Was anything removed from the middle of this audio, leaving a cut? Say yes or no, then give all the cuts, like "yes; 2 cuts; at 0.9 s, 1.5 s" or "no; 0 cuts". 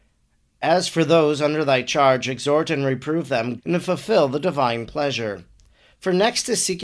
yes; 1 cut; at 3.6 s